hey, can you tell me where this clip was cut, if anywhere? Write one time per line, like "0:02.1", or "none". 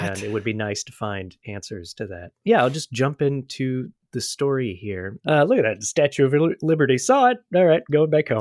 0:05.2